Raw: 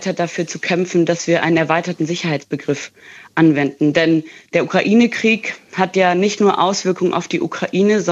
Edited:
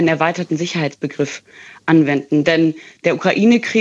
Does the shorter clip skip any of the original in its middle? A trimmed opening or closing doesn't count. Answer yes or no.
no